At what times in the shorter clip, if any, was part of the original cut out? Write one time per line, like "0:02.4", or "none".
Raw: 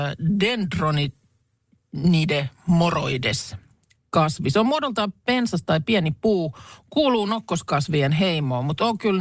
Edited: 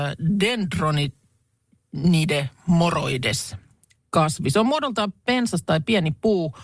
none